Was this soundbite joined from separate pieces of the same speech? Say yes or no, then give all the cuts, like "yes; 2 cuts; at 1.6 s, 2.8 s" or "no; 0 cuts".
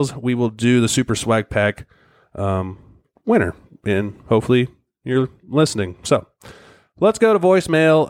no; 0 cuts